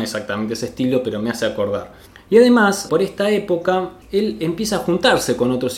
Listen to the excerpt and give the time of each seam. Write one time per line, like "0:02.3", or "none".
0:02.9
0:04.0